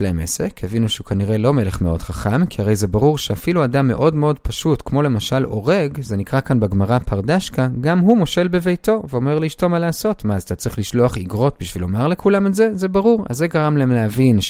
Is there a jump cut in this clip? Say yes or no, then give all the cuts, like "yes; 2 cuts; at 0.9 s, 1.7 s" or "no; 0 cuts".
no; 0 cuts